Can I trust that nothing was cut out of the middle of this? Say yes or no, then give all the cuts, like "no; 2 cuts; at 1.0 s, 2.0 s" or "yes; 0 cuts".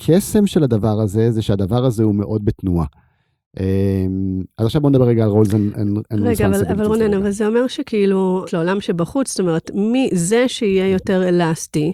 no; 1 cut; at 8.5 s